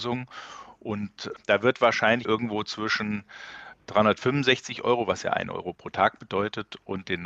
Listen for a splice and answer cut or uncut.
cut